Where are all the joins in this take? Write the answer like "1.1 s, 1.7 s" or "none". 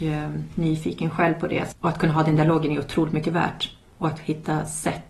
1.7 s